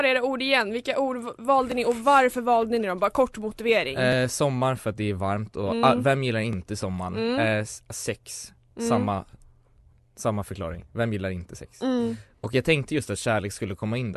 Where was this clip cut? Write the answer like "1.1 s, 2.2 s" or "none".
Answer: none